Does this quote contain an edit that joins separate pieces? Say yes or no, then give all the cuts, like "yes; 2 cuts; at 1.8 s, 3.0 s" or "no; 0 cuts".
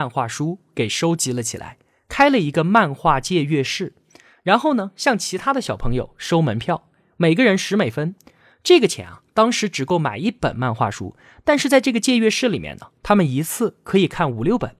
no; 0 cuts